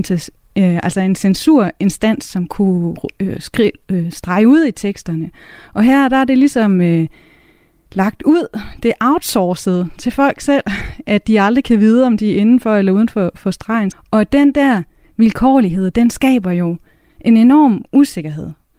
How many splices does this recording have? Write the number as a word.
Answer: one